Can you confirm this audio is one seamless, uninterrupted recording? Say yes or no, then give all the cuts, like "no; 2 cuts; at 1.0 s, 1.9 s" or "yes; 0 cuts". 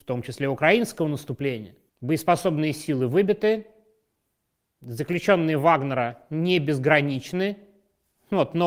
no; 1 cut; at 1.9 s